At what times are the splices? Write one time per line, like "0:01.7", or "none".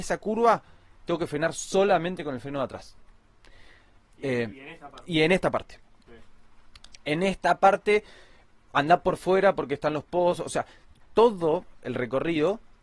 0:06.1
0:10.9